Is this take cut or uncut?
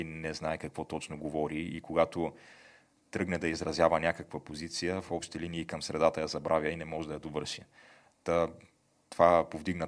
uncut